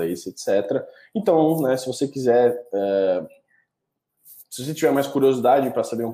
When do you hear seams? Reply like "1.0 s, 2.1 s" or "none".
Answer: none